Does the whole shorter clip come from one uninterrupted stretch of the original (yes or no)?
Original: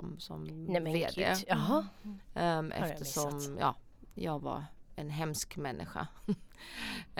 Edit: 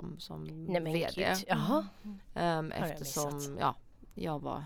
yes